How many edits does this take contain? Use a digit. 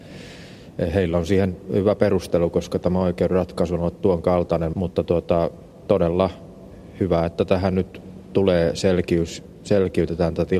1